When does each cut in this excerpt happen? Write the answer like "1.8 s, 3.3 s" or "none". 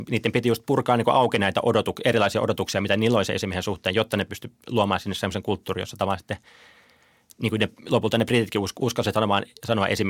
8.8 s